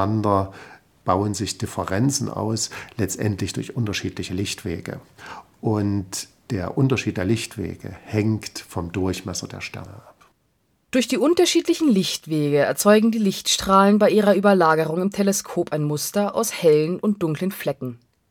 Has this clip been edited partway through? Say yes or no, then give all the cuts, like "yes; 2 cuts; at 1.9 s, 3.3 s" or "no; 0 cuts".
no; 0 cuts